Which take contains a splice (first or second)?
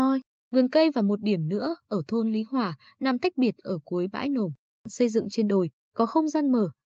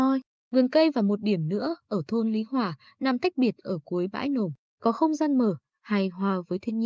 second